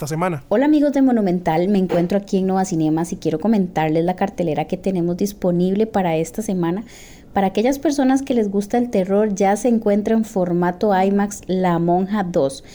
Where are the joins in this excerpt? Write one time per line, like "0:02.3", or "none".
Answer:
none